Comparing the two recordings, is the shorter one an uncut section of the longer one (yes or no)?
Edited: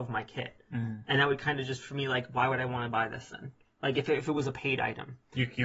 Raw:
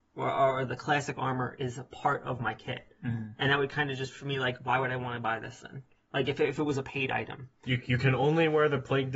yes